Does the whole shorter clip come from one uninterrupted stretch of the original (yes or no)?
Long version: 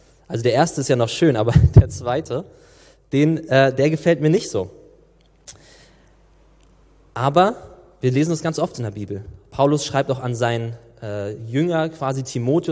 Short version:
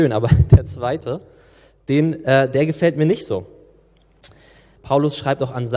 no